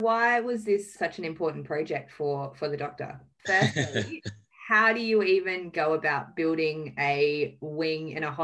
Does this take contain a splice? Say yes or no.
yes